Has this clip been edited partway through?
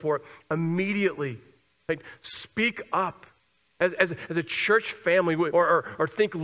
yes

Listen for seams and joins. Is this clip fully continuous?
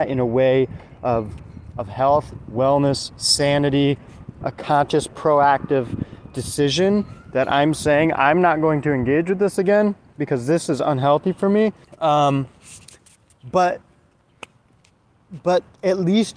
no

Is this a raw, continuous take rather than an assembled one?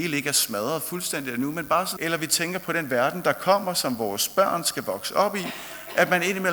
no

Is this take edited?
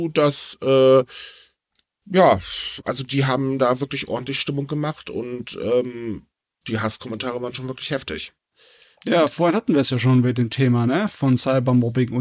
no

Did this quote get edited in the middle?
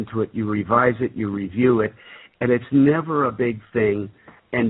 no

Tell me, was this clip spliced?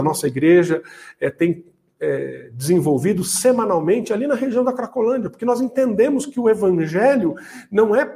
no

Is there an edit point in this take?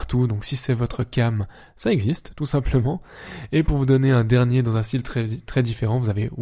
no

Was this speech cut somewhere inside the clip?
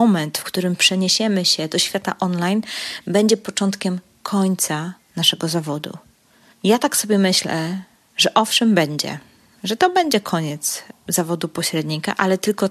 no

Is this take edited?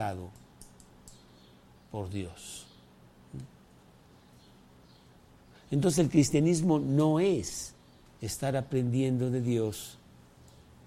no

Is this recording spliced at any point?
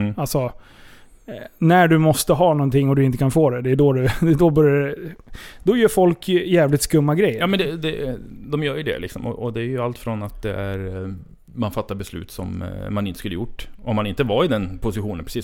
no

